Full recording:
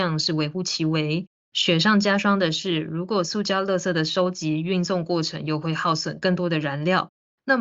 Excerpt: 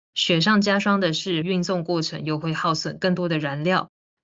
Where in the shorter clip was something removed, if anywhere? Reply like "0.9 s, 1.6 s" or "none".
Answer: 1.4 s